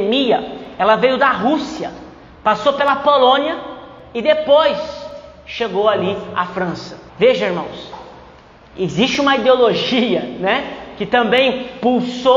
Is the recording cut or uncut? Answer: cut